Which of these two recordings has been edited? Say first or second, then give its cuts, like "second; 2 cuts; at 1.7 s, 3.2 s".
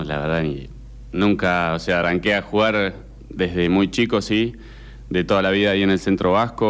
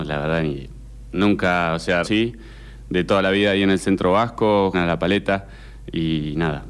second; 2 cuts; at 2.0 s, 4.7 s